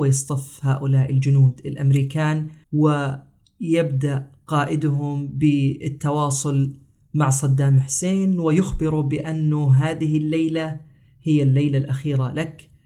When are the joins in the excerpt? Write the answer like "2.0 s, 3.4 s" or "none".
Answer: 2.6 s

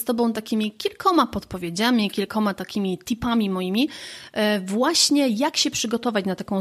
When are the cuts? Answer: none

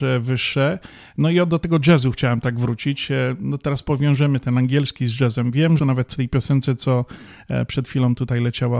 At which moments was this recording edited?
5.8 s

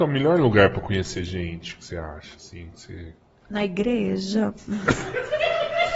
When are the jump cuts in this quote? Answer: none

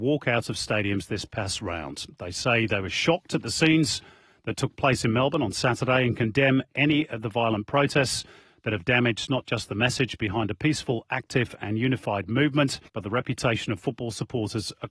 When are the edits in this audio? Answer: 12.9 s

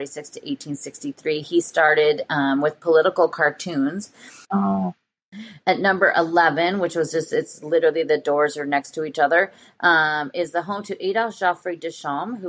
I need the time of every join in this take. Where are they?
4.4 s

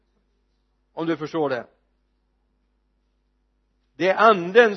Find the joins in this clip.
none

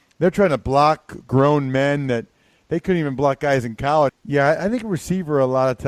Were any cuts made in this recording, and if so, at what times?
4.1 s

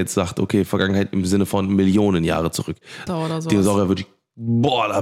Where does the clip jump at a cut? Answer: 3.1 s

